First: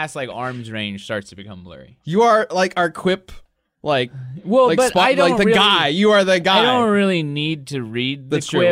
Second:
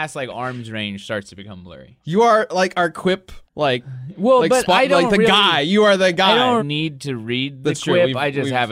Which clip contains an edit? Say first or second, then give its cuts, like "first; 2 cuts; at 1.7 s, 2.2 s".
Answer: second; 2 cuts; at 3.5 s, 6.6 s